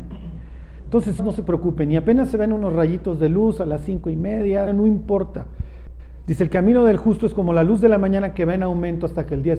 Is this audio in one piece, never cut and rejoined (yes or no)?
no